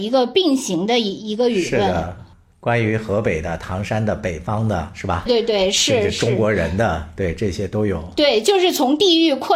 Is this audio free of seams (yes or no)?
no